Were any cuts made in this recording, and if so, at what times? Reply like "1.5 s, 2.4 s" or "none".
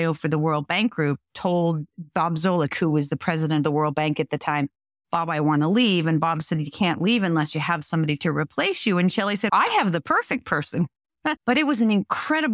9.5 s, 11.4 s